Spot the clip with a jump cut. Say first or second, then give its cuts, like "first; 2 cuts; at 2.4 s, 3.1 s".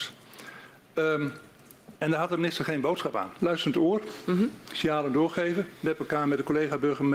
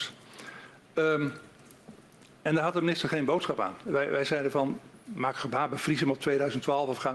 first; 2 cuts; at 2.0 s, 3.4 s